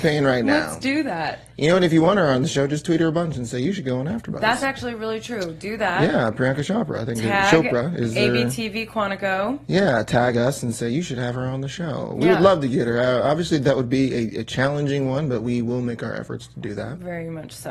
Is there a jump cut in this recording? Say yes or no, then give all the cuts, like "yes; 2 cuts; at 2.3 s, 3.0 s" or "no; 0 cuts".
no; 0 cuts